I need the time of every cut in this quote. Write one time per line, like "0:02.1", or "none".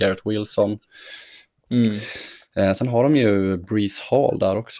0:01.5